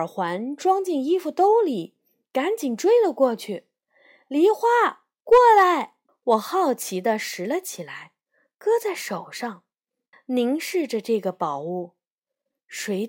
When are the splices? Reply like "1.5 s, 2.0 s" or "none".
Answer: 6.1 s, 10.1 s